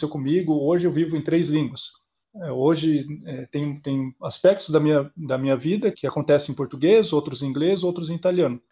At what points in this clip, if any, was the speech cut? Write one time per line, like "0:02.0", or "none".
0:05.9